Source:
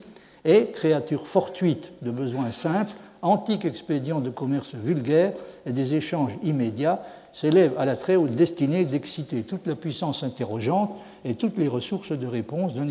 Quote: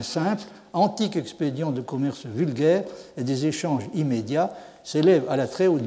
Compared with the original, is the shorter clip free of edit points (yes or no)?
yes